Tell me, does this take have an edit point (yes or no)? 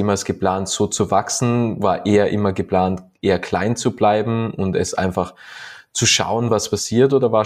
no